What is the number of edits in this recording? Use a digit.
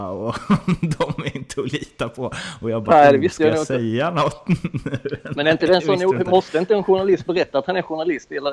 0